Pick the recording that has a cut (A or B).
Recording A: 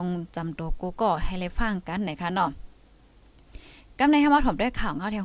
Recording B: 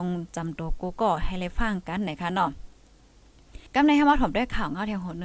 B